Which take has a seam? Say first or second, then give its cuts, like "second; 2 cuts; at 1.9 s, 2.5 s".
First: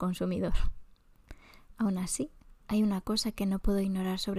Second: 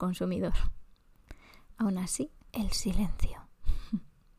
second; 1 cut; at 2.5 s